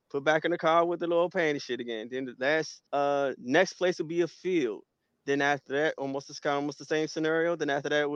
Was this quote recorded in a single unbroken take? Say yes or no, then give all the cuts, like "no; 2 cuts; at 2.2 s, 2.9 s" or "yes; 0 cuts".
no; 1 cut; at 2.9 s